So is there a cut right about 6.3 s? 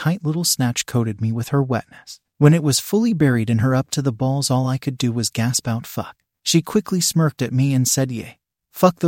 no; 0 cuts

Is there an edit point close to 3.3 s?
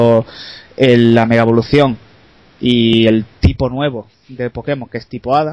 no; 0 cuts

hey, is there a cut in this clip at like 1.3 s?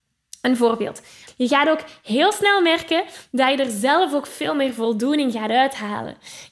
yes; 1 cut; at 1.3 s

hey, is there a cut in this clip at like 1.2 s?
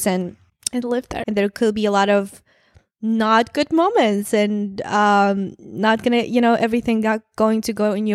yes; 1 cut; at 1.2 s

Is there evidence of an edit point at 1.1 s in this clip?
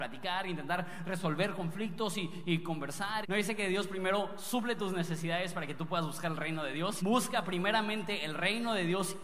no; 2 cuts; at 3.2 s, 7.0 s

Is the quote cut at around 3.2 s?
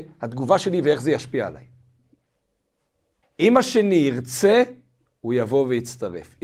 yes; 1 cut; at 3.2 s

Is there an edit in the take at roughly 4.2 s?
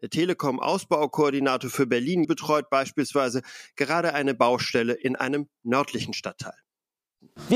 no; 1 cut; at 2.2 s

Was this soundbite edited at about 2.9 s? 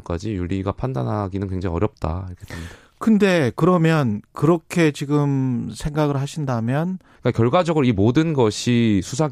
no; 1 cut; at 7.2 s

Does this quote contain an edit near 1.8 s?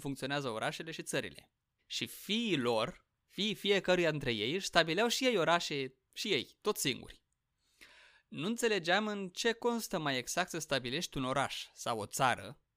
yes; 1 cut; at 1.8 s

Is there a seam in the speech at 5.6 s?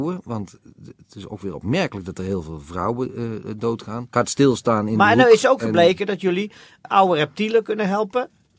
no; 2 cuts; at 4.1 s, 6.8 s

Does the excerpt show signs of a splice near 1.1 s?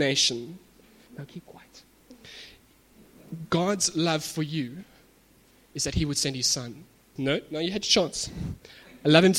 yes; 2 cuts; at 1.1 s, 7.2 s

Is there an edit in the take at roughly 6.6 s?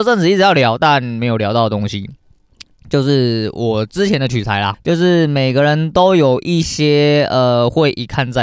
yes; 2 cuts; at 4.7 s, 6.6 s

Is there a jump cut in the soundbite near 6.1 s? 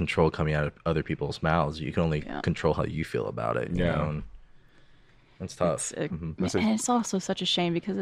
yes; 1 cut; at 6.1 s

